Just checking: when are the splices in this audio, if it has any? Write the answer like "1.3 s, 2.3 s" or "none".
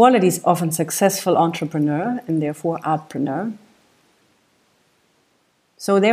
none